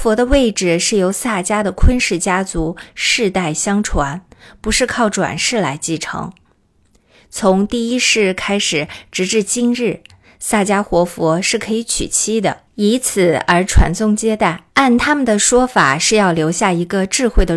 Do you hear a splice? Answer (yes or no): yes